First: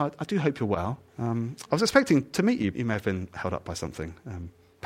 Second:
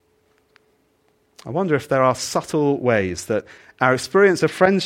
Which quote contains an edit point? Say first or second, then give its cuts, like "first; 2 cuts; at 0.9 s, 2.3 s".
first; 2 cuts; at 1.1 s, 2.7 s